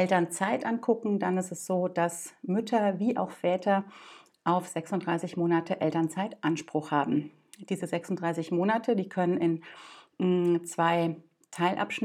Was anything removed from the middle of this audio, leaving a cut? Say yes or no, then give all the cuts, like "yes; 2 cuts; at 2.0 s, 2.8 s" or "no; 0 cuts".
no; 0 cuts